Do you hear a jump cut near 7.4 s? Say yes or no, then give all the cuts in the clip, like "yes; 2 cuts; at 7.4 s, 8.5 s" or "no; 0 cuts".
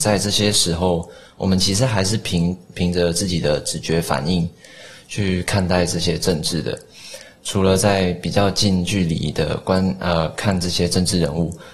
yes; 1 cut; at 7.4 s